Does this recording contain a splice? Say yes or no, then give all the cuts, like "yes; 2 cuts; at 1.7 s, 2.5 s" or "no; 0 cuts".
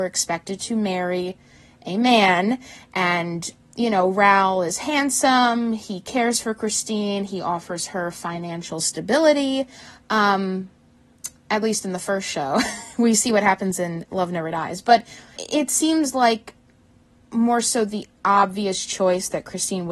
yes; 1 cut; at 15.4 s